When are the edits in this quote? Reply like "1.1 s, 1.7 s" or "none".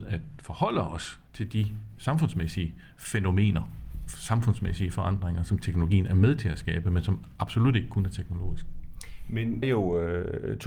9.6 s